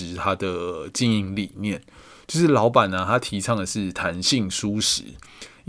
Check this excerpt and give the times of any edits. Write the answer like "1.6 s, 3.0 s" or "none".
none